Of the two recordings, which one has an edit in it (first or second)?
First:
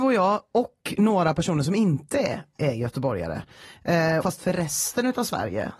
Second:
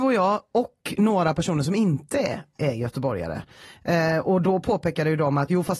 first